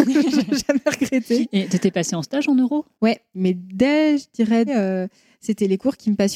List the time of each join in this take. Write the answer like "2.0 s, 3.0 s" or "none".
3.3 s, 4.7 s